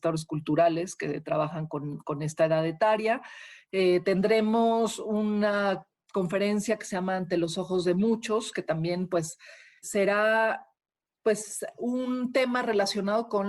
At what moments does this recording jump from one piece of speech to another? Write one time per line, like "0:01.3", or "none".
0:09.8